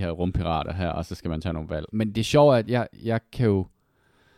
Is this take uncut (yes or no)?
no